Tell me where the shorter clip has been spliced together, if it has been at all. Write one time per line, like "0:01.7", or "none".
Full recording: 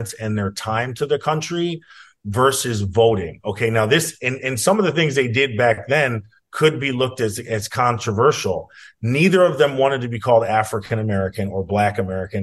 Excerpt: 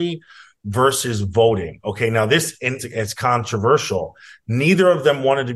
0:02.8